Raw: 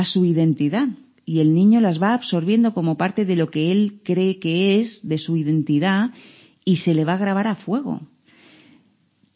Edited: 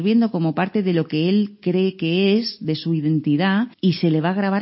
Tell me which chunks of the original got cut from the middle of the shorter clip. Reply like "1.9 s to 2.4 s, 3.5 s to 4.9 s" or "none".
6.2 s to 6.6 s